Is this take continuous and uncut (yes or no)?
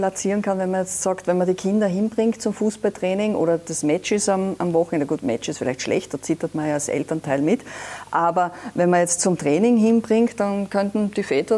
yes